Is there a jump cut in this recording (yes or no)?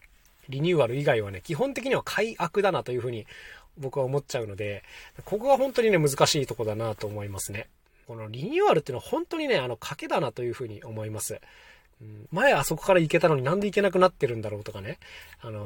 yes